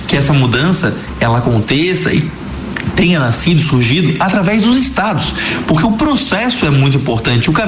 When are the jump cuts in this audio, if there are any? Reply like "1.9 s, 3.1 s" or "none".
none